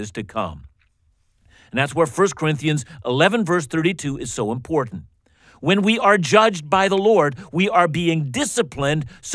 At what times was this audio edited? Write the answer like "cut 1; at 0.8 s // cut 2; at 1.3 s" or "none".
none